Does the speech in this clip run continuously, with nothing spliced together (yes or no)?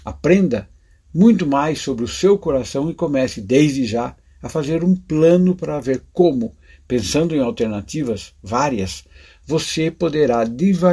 yes